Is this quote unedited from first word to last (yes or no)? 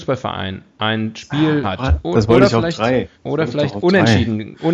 no